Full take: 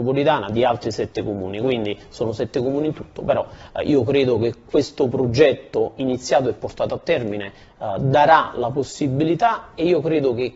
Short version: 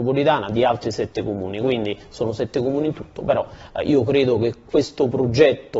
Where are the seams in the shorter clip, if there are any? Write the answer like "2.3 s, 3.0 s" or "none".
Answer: none